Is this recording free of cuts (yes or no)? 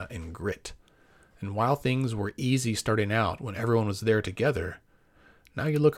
yes